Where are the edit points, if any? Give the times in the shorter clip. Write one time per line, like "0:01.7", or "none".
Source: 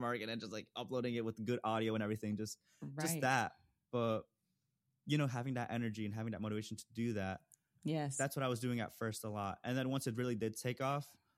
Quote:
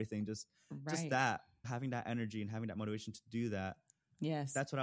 0:01.6